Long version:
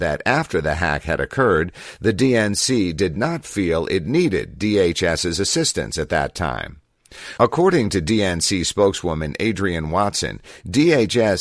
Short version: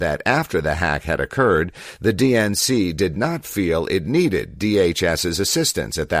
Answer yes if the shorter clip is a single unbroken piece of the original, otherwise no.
yes